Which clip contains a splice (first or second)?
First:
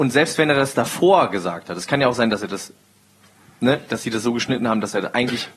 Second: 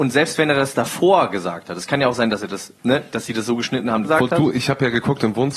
second